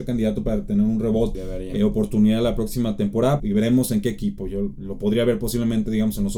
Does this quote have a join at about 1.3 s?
yes; 2 cuts; at 1.3 s, 3.4 s

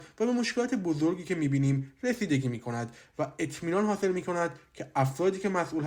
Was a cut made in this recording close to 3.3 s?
no; 0 cuts

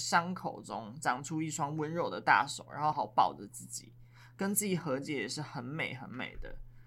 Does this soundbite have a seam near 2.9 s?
yes; 1 cut; at 2.9 s

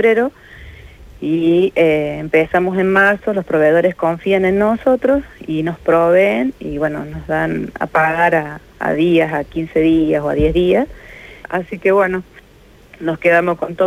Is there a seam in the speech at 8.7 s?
no; 1 cut; at 11.4 s

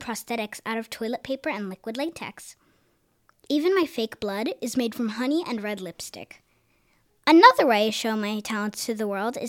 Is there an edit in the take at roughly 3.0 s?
no; 1 cut; at 7.1 s

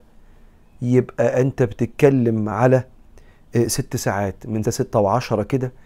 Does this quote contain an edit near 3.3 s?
no; 1 cut; at 4.6 s

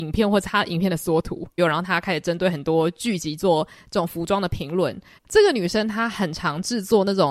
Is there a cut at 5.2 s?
yes; 2 cuts; at 1.6 s, 5.2 s

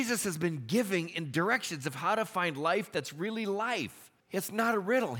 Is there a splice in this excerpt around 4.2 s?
yes; 1 cut; at 4.2 s

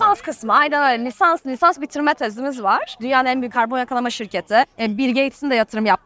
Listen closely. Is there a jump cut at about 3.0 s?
yes; 1 cut; at 3.0 s

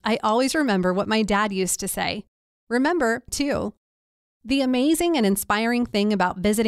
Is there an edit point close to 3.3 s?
yes; 1 cut; at 3.3 s

